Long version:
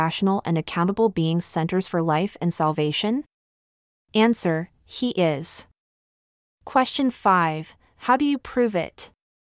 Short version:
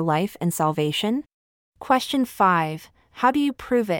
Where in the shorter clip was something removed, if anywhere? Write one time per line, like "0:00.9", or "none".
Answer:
0:01.6